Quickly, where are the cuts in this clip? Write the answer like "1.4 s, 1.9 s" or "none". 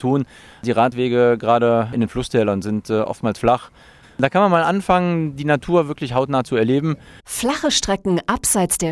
4.0 s, 7.2 s